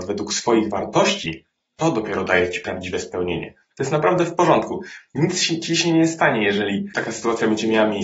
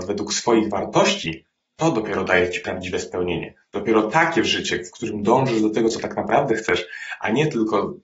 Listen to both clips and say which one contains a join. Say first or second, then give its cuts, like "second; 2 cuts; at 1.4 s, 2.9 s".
first; 1 cut; at 3.7 s